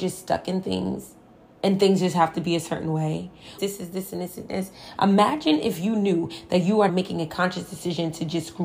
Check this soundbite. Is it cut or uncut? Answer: cut